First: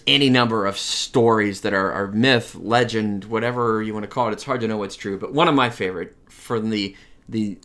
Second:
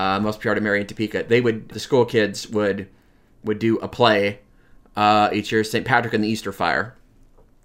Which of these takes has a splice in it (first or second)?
second